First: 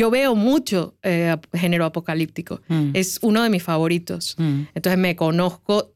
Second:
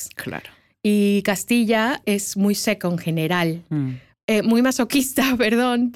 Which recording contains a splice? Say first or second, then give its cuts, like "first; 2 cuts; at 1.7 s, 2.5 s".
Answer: second; 2 cuts; at 2.0 s, 4.1 s